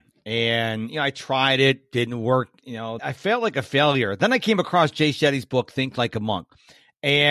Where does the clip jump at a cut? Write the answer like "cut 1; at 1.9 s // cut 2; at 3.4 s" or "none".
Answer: cut 1; at 3.0 s